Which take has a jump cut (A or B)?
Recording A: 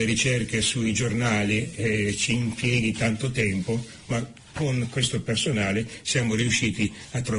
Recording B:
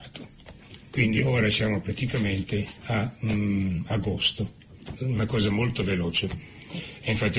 B